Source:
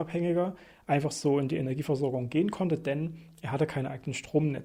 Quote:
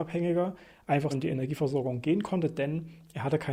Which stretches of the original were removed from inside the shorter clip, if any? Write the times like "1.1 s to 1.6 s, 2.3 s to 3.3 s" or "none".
1.1 s to 1.4 s